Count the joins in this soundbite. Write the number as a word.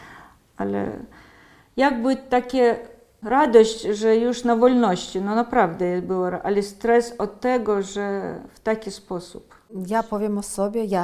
zero